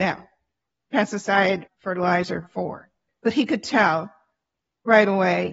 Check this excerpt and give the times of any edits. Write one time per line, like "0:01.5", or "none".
0:01.7
0:03.1